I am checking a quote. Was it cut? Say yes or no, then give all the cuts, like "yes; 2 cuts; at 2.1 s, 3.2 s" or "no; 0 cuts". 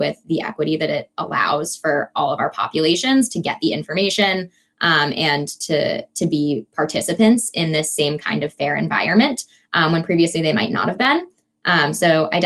no; 0 cuts